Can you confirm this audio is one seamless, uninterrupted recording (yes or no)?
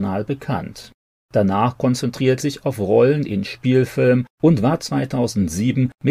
no